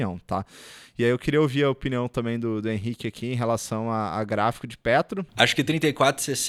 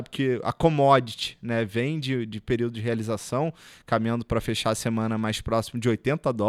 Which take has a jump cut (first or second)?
first